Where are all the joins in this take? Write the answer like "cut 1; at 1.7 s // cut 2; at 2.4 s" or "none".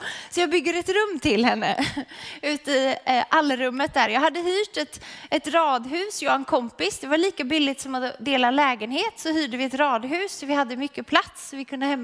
none